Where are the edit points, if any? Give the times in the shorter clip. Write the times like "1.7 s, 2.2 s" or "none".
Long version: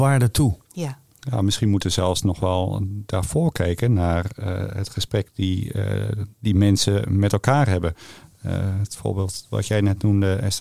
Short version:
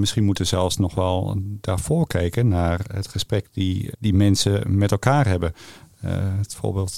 2.9 s, 3.9 s